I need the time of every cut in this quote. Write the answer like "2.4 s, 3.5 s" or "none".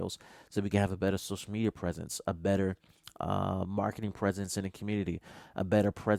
none